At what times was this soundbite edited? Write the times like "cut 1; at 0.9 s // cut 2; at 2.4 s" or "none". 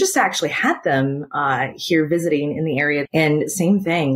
cut 1; at 3.1 s

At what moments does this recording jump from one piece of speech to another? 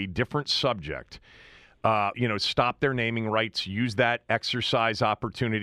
cut 1; at 2.1 s

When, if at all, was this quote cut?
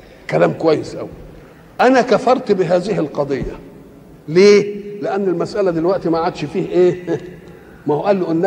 none

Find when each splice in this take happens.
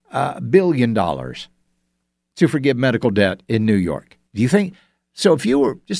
cut 1; at 4.3 s

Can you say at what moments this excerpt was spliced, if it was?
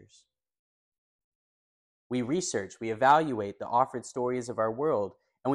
cut 1; at 1.9 s

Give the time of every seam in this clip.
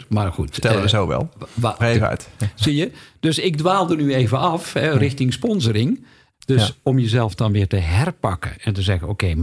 cut 1; at 1.8 s // cut 2; at 6.3 s

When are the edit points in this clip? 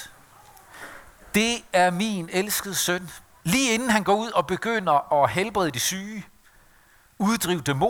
cut 1; at 3.4 s

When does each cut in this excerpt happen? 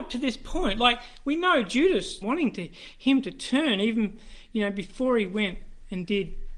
cut 1; at 2.2 s

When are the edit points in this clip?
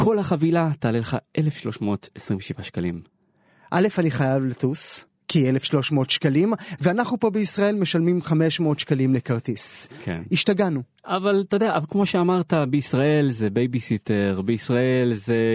none

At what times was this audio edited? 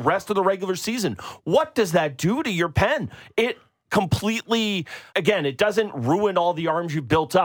cut 1; at 5.1 s

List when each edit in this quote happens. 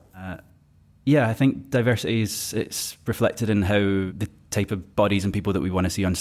cut 1; at 4.9 s

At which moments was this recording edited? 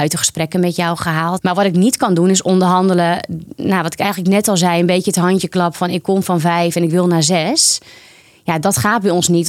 cut 1; at 1.4 s

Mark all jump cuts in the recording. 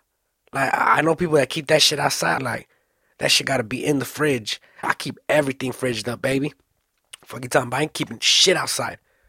cut 1; at 2.4 s // cut 2; at 4.8 s

